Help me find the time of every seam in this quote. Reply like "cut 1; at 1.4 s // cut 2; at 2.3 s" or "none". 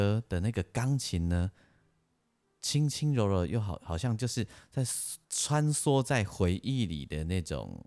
cut 1; at 5.2 s